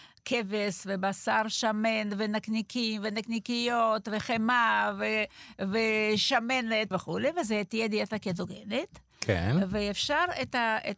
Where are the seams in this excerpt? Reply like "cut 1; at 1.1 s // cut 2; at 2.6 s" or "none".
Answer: cut 1; at 6.9 s